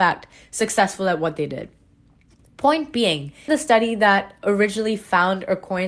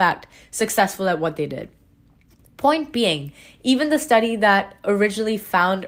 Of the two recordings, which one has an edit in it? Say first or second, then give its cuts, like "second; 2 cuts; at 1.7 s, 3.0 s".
first; 1 cut; at 3.5 s